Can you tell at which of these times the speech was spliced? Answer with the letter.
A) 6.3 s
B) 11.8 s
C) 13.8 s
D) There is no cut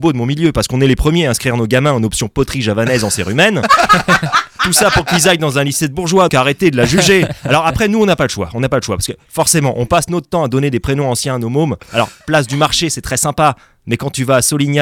A